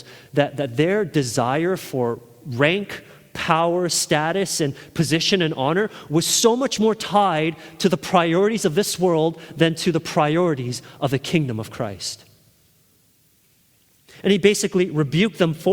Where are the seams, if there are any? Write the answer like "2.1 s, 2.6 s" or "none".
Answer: none